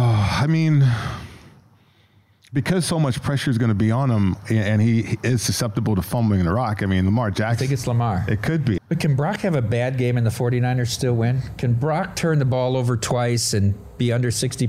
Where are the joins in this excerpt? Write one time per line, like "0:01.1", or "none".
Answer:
0:08.8

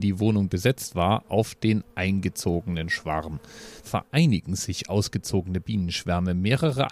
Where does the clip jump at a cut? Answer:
0:03.8

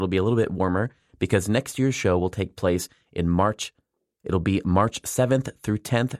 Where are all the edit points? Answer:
none

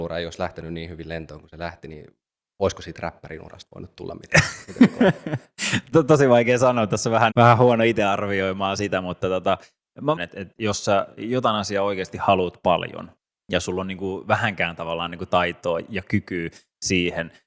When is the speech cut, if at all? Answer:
0:07.3
0:10.2

